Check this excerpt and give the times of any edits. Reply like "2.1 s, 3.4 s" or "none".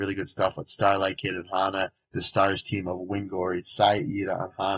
2.0 s